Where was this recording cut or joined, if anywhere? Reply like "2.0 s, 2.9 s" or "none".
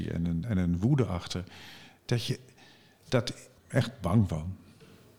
3.6 s